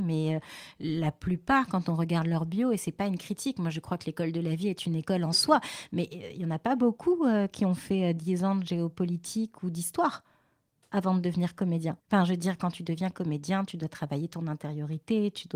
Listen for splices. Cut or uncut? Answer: cut